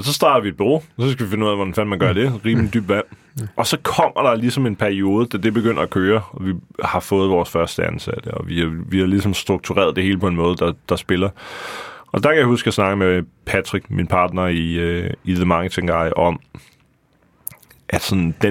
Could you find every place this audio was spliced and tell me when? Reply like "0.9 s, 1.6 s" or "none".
13.8 s